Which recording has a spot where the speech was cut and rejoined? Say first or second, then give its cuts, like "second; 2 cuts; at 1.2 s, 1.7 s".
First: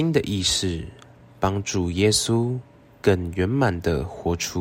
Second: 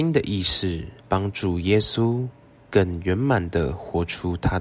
second; 1 cut; at 1.0 s